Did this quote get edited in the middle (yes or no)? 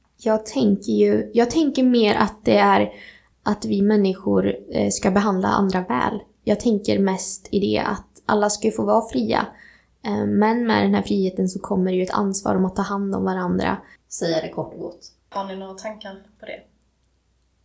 yes